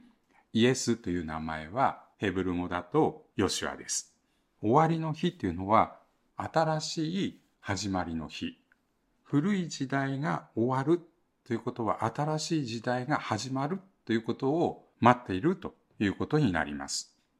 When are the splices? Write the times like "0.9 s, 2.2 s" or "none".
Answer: 4.6 s